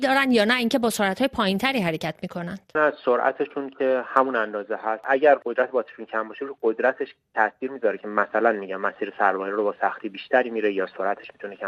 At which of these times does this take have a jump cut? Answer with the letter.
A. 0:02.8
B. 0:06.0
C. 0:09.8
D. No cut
A